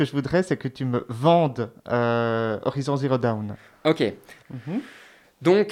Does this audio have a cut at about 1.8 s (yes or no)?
no